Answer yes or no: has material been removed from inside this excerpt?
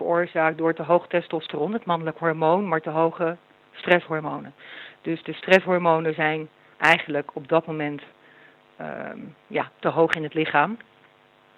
yes